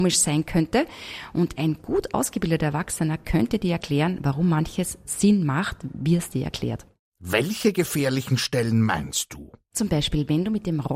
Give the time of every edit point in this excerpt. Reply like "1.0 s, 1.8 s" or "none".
none